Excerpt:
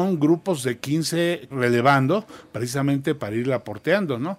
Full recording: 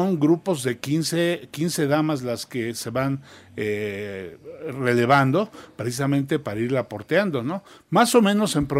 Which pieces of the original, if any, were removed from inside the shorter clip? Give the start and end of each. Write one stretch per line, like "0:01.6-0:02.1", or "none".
0:01.5-0:04.7